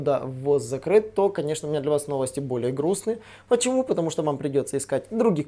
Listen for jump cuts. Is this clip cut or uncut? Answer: uncut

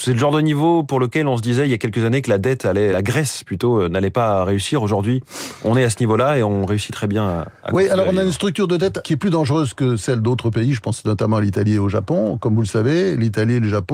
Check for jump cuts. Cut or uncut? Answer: cut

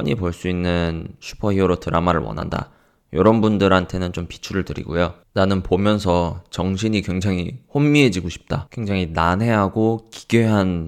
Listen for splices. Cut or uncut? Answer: uncut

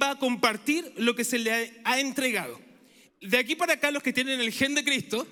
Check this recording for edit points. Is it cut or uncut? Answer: cut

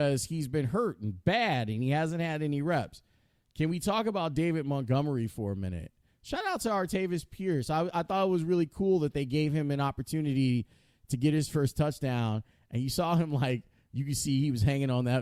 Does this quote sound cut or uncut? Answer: uncut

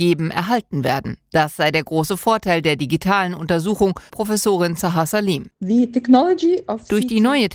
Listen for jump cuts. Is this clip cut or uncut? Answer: cut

